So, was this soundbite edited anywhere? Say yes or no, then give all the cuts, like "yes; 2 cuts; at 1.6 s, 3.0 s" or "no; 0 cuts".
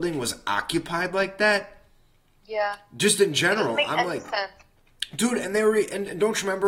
no; 0 cuts